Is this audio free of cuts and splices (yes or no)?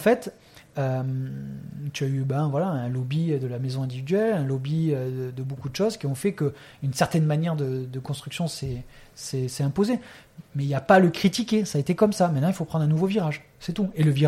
yes